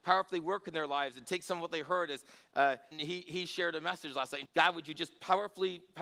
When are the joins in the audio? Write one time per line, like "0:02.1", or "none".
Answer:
0:02.9
0:04.5